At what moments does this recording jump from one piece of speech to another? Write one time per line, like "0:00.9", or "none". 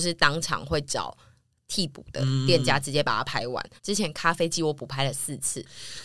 0:03.8